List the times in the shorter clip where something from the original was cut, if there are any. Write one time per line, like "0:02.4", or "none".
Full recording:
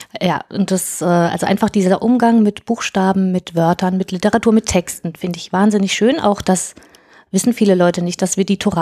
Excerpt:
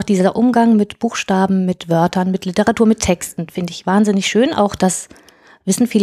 none

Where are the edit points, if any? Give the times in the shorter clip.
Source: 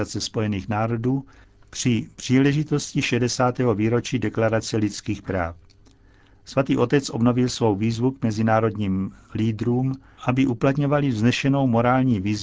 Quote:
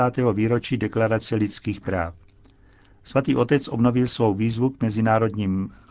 none

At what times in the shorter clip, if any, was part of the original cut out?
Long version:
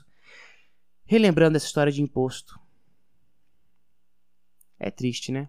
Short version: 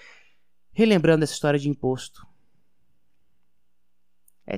none

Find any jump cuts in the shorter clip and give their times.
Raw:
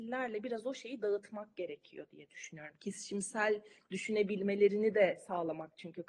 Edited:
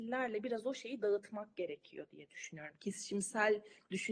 none

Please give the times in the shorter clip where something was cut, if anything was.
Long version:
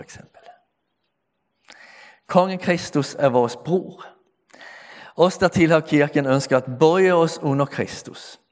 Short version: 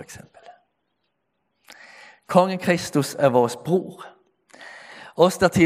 none

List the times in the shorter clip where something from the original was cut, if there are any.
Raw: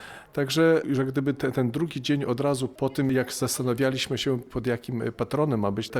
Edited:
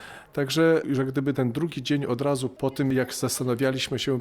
0:01.3

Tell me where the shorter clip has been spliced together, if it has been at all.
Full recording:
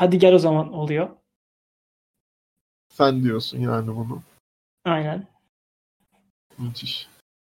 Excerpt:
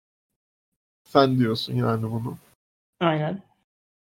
none

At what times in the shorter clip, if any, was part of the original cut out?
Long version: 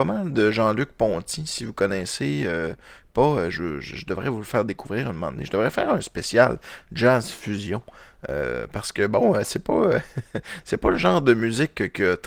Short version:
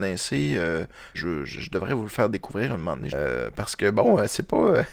0:01.1
0:03.1

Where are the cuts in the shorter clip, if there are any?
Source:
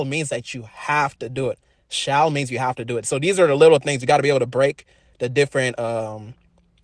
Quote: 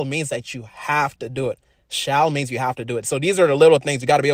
none

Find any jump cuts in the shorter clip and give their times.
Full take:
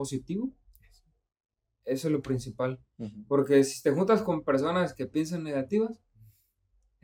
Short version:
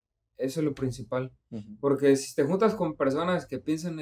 none

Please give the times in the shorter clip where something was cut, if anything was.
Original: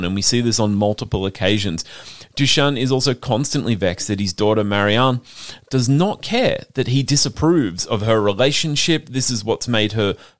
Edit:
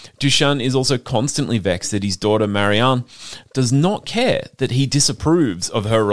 none

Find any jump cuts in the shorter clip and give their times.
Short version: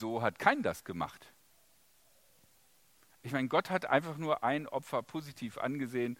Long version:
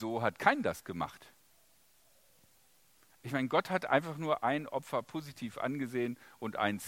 none

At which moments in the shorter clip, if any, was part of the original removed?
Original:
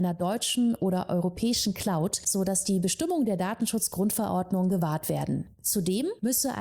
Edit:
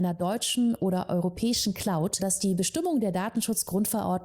0:02.2

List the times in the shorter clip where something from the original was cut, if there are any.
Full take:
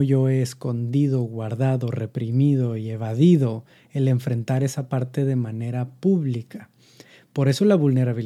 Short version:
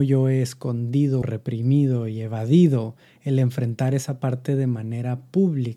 0:01.2

